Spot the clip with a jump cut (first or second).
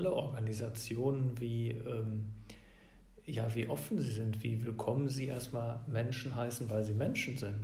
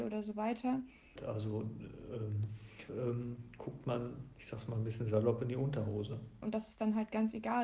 second